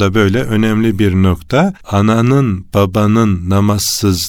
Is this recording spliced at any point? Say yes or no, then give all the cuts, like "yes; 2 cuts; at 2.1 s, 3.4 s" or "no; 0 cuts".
yes; 1 cut; at 1.8 s